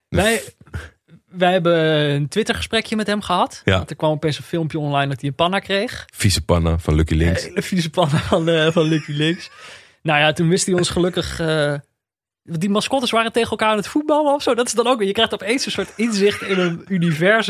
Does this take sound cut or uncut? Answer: uncut